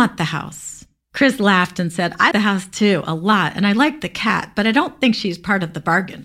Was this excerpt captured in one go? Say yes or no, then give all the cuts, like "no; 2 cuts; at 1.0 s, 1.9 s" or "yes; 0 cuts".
no; 2 cuts; at 1.0 s, 2.3 s